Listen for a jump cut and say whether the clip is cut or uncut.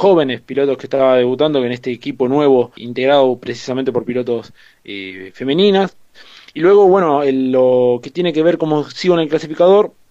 cut